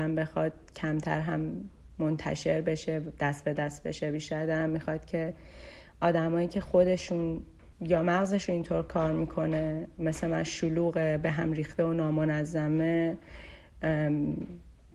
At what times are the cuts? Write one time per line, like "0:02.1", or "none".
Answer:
0:07.7

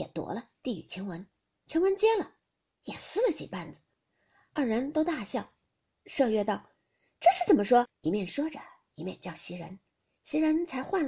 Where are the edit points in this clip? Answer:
0:07.9

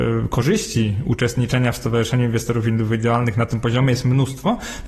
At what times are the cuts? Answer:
none

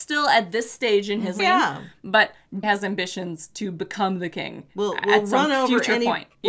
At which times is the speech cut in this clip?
0:01.4
0:02.6

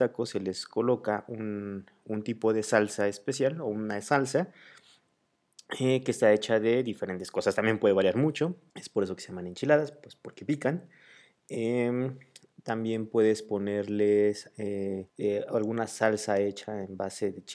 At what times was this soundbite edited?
0:08.7
0:15.1

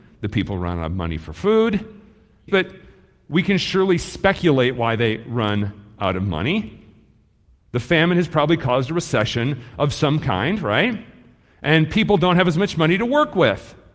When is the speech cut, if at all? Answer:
0:02.5

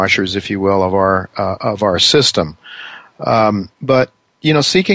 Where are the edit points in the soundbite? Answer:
0:03.7

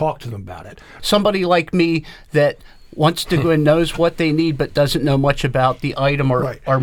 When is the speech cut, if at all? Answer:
0:01.0

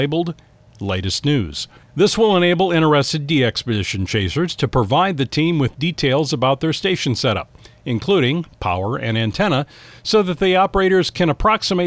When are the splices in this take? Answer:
none

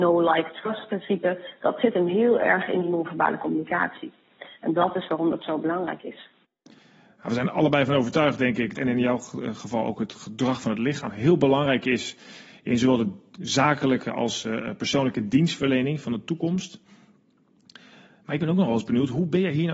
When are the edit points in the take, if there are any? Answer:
0:08.7

